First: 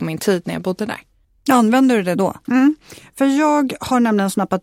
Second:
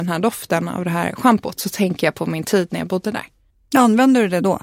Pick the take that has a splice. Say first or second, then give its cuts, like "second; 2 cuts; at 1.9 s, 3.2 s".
first; 1 cut; at 2.4 s